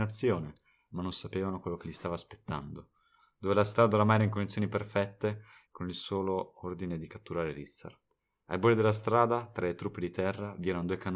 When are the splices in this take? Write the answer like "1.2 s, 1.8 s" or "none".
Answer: 5.7 s